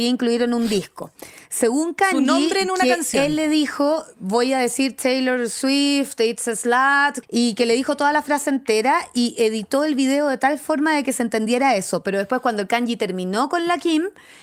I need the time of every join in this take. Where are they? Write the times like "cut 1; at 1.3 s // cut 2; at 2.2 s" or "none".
cut 1; at 7.2 s